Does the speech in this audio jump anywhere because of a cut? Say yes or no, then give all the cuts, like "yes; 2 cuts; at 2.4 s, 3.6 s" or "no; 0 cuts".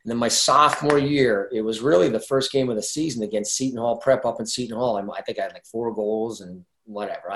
no; 0 cuts